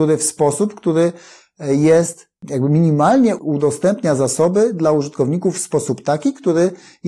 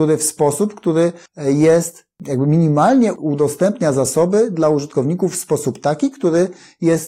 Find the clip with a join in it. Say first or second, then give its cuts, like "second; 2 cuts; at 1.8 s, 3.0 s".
second; 1 cut; at 1.3 s